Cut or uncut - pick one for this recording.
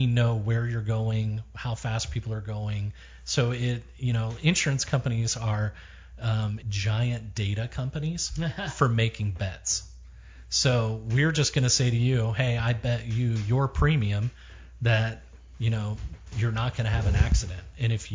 cut